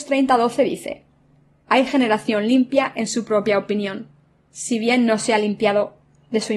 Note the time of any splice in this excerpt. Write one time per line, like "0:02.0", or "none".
0:01.6

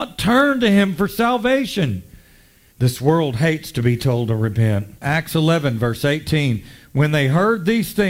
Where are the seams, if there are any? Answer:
0:02.7
0:05.0

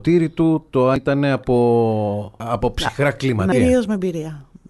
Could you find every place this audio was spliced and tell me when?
0:02.4
0:03.5

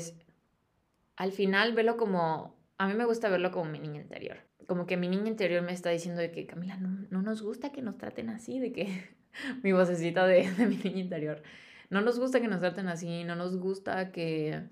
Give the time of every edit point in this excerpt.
none

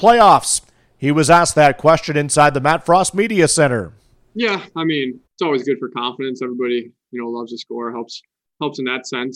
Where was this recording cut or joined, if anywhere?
0:05.3

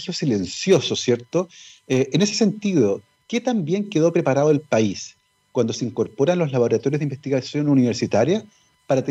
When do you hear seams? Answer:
none

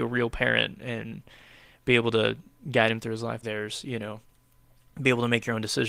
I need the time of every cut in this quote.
0:03.4

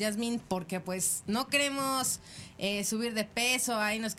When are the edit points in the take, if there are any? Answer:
none

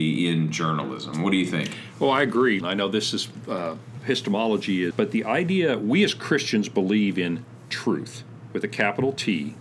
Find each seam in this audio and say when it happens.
0:02.6
0:04.9

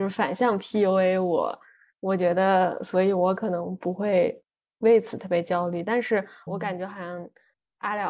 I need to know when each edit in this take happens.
0:06.5

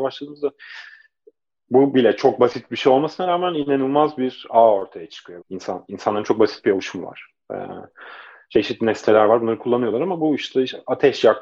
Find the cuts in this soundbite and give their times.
0:05.4

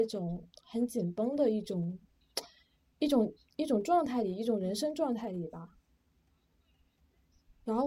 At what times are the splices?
none

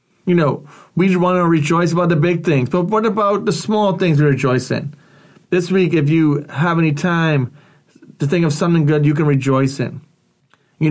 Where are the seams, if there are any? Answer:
0:05.4

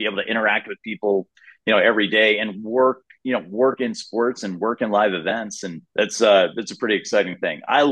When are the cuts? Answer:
0:05.9

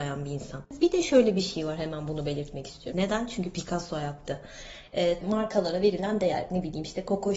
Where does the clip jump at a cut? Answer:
0:02.9
0:05.2

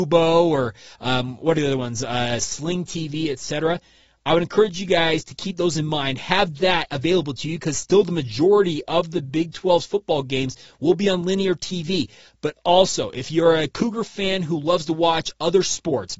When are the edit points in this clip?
none

